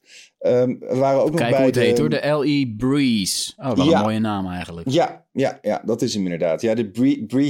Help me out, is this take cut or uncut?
uncut